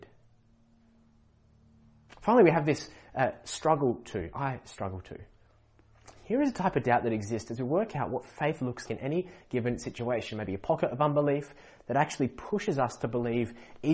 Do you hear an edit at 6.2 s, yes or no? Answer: no